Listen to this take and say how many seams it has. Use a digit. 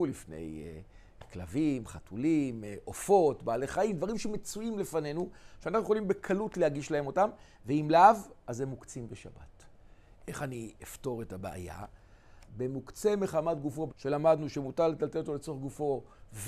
3